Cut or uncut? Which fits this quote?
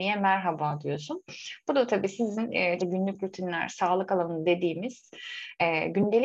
cut